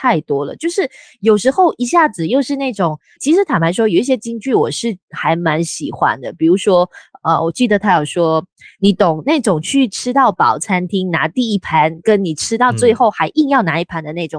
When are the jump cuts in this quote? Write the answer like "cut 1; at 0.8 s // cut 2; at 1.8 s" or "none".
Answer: cut 1; at 3.2 s